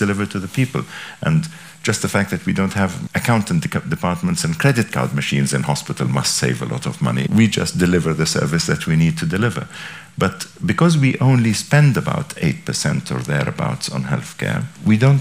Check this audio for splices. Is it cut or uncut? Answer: uncut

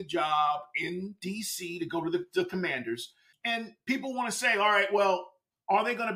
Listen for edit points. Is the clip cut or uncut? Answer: cut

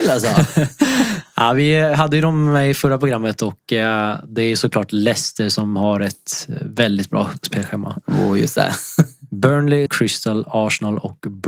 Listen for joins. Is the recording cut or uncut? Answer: cut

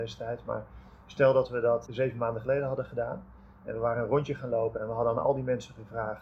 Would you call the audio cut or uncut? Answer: cut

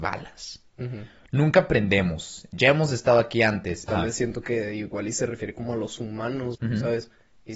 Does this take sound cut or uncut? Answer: cut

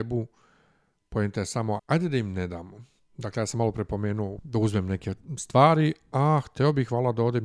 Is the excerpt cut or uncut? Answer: cut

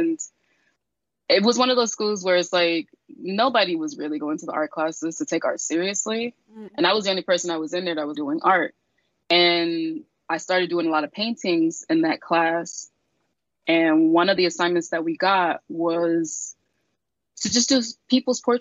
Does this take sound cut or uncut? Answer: cut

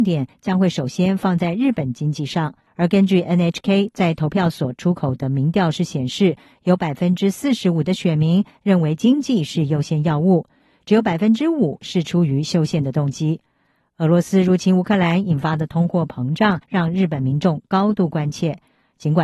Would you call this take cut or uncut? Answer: cut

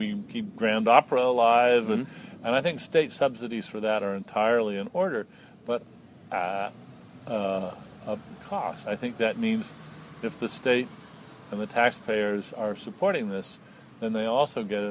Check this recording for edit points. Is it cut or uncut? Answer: uncut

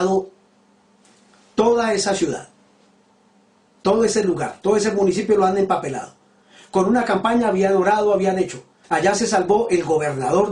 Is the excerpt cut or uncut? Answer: cut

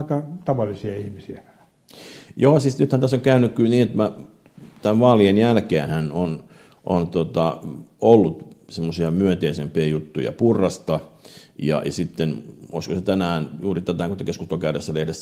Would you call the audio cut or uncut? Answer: uncut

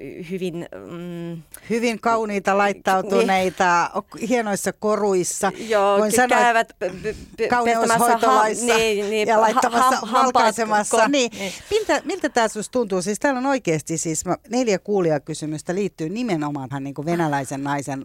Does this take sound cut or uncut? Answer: cut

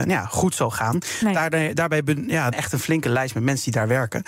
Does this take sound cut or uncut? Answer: cut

